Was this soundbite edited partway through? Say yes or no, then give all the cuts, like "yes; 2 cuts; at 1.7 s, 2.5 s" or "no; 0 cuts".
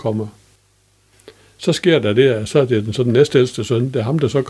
no; 0 cuts